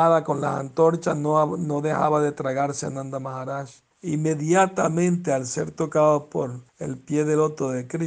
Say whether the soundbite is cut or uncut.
cut